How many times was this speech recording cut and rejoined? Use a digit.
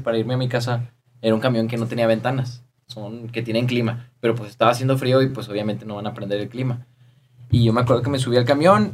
0